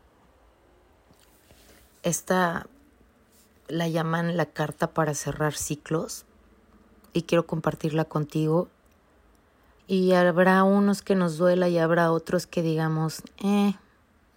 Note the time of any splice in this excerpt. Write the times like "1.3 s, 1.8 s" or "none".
9.8 s